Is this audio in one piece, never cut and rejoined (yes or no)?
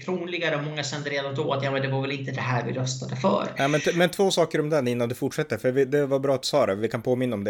yes